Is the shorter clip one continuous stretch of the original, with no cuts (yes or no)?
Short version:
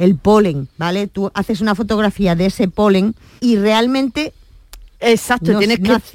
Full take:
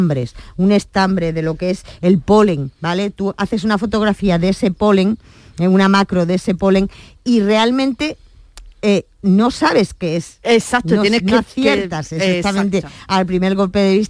no